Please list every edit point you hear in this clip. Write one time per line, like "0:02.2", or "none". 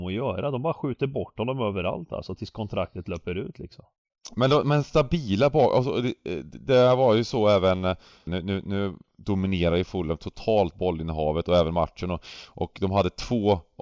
0:08.3